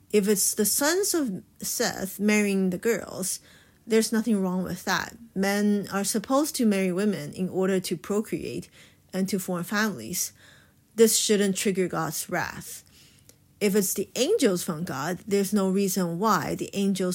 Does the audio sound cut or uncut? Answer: uncut